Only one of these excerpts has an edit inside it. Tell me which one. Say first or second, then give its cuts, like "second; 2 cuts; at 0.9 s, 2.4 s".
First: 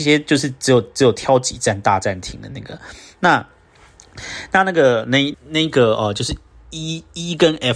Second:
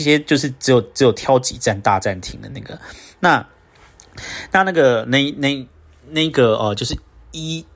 first; 1 cut; at 5.3 s